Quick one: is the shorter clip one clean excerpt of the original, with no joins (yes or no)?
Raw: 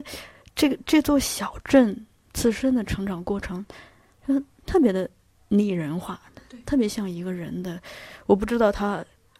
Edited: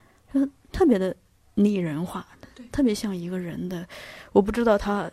yes